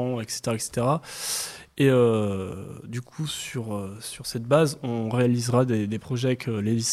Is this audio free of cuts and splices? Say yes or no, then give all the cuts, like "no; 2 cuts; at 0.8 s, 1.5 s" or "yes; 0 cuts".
yes; 0 cuts